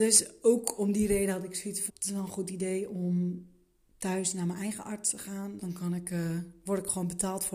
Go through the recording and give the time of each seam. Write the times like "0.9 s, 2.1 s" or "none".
1.9 s, 5.6 s